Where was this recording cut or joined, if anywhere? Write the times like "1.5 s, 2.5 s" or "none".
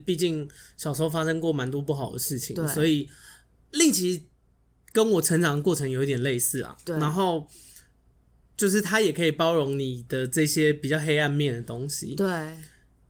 none

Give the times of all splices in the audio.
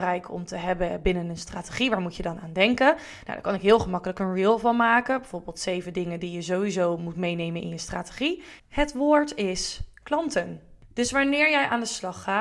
8.6 s

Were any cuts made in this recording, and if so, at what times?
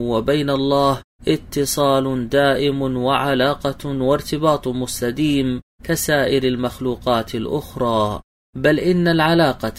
none

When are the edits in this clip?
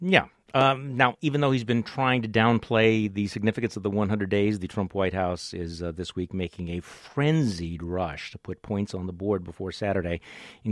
none

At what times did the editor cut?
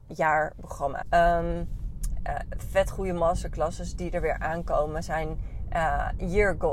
1.0 s

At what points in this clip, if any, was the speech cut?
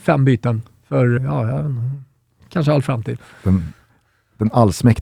1.2 s

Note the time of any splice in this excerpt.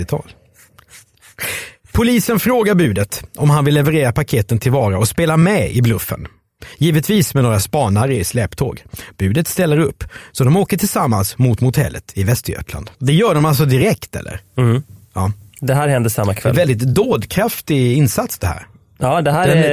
12.9 s

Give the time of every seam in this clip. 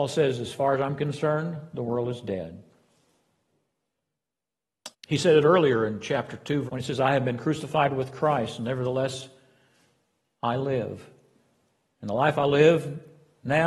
4.9 s, 6.7 s

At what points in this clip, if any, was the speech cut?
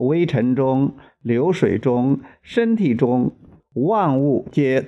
3.6 s

